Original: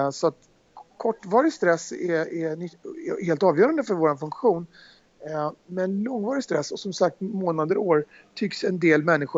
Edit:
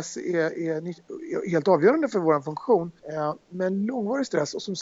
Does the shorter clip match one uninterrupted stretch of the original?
no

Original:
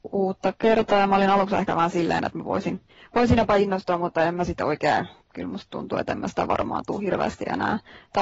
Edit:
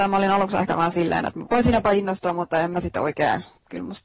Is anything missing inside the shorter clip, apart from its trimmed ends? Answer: yes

